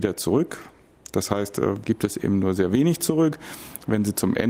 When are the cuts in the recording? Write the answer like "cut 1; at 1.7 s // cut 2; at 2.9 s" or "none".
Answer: cut 1; at 1.8 s